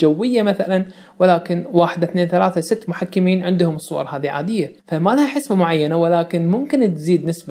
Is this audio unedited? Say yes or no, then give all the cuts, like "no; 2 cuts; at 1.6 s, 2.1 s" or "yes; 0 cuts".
no; 1 cut; at 4.8 s